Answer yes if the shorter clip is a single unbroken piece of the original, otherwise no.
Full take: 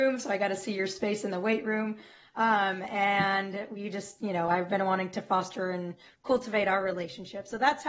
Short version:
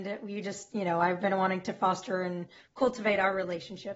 yes